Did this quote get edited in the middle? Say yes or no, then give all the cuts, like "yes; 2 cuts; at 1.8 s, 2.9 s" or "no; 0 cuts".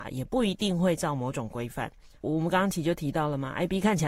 yes; 1 cut; at 2.2 s